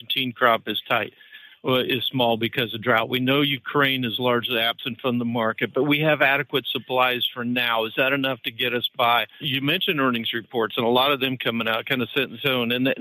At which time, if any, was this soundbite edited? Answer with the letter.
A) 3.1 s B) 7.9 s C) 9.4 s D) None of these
C